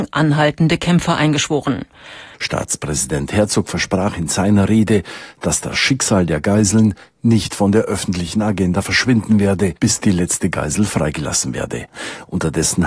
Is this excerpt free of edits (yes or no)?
no